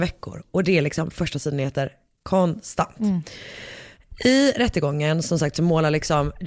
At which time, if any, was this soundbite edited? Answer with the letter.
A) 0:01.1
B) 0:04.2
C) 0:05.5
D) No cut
D